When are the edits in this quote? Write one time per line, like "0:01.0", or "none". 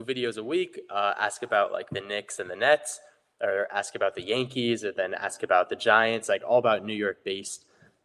none